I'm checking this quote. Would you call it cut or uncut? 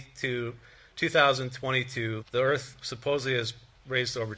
cut